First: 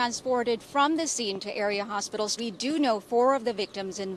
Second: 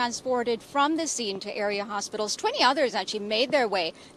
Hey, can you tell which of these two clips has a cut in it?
first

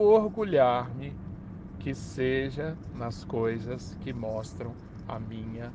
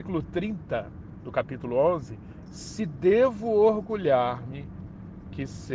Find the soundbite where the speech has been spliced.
second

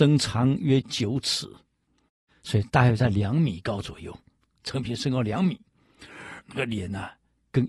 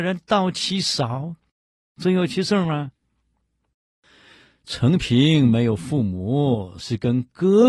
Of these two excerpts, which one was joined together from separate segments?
first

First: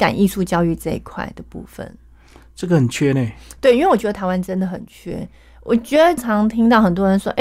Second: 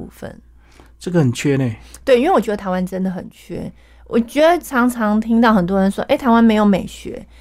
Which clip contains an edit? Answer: first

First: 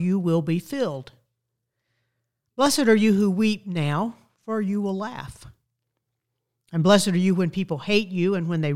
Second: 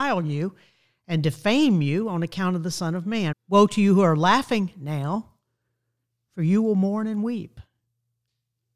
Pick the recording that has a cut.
second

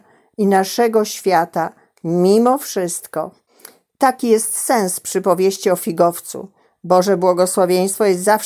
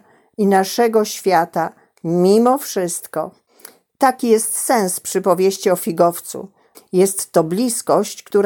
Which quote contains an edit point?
second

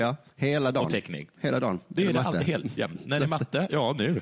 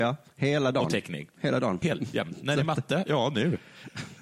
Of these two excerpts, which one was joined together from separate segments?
second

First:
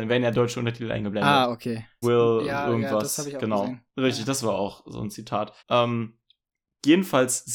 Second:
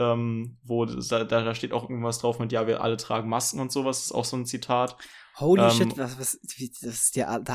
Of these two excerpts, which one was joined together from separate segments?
first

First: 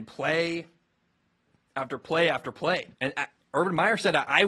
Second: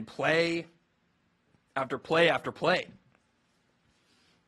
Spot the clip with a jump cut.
first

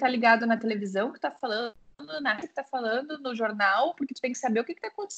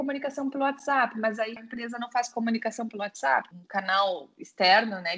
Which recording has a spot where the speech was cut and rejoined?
second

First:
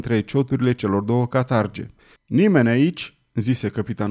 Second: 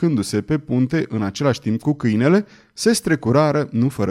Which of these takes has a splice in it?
first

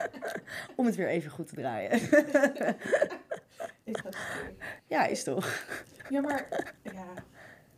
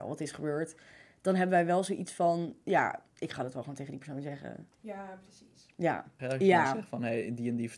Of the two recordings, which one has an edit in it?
second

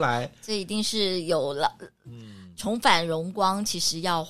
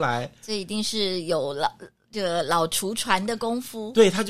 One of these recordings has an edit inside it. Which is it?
first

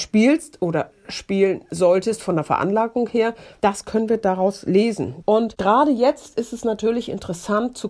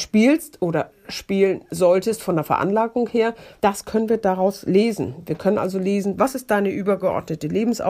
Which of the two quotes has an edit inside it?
first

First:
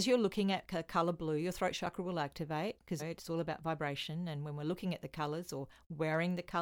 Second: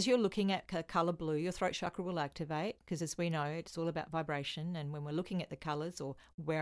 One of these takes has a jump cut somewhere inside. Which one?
first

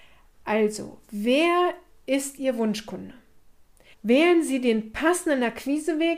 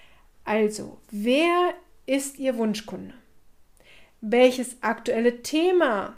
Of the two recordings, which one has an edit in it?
first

